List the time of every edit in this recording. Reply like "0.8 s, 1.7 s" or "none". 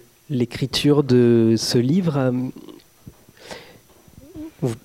none